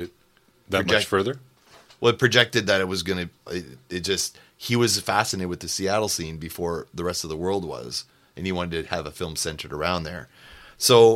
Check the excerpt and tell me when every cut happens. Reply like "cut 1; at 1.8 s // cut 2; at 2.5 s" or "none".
cut 1; at 3.5 s